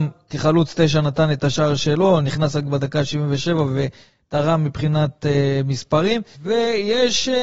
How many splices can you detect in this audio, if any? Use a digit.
1